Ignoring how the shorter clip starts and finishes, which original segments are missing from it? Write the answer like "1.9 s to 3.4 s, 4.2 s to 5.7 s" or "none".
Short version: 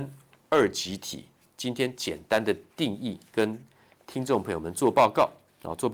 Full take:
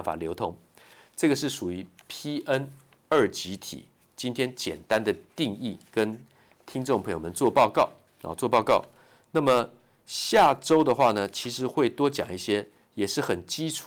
none